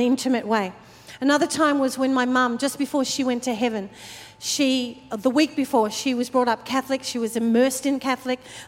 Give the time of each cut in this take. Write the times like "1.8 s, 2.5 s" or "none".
none